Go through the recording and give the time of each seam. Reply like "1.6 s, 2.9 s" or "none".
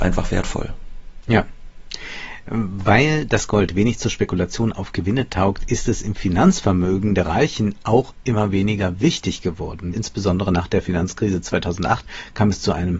9.9 s